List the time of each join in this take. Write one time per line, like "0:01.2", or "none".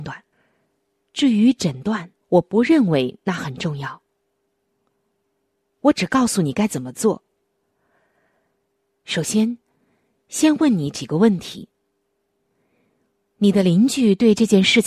0:02.2